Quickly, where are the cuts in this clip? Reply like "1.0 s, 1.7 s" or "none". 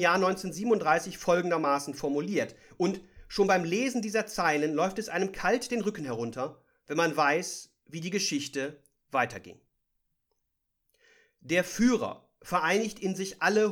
none